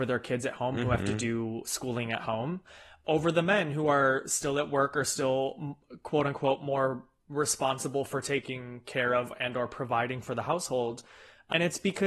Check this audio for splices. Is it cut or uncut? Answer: uncut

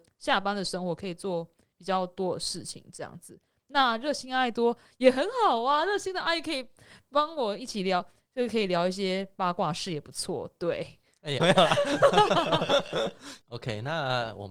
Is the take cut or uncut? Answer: cut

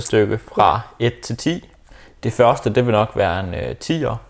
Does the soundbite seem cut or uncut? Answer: uncut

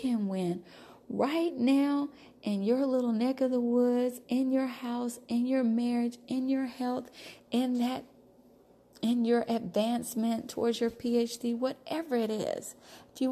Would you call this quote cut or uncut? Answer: cut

